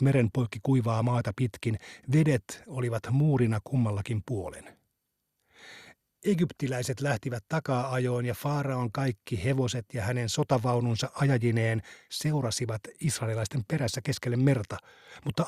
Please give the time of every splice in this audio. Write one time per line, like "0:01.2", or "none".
none